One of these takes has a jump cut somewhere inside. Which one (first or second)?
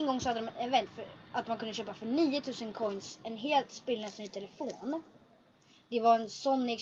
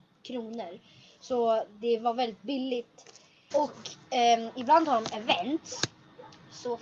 second